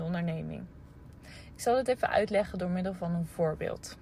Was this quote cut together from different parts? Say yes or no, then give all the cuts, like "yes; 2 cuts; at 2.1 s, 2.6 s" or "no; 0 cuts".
no; 0 cuts